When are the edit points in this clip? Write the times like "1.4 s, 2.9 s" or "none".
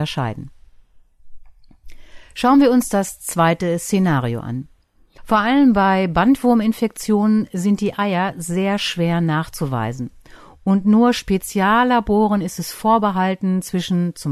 5.2 s